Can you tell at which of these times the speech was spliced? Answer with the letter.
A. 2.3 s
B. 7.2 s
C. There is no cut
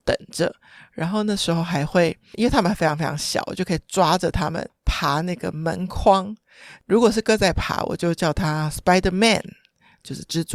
B